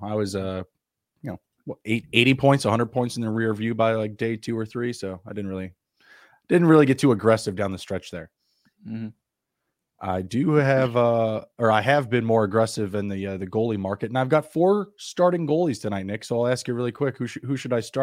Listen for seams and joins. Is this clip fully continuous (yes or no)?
yes